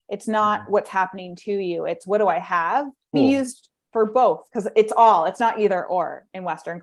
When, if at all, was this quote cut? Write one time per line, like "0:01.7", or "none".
0:03.1
0:04.5

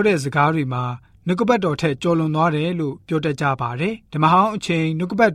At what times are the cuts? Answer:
0:04.1

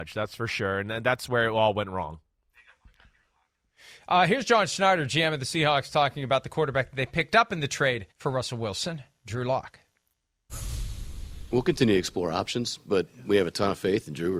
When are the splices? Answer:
0:08.1

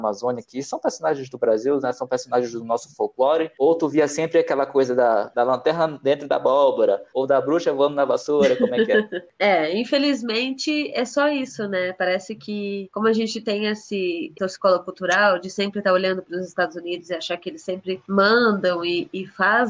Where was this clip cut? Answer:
none

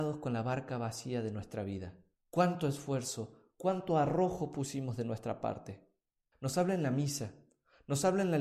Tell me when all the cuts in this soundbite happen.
0:02.1
0:03.5
0:06.3

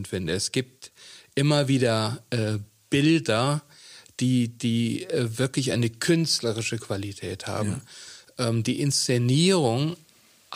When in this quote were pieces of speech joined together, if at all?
none

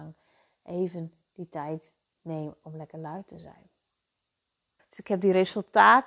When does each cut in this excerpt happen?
0:04.8

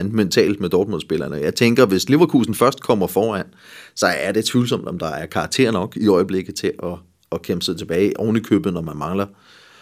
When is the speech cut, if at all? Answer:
none

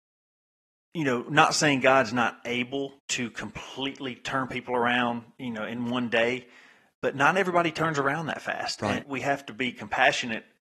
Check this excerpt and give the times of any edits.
0:03.0
0:09.0

